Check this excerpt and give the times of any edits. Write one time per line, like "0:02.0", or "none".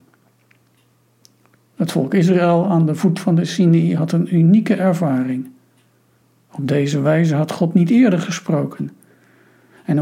none